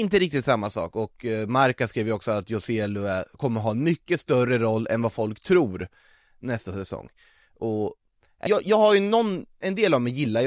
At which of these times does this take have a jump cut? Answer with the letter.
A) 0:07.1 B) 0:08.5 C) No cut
B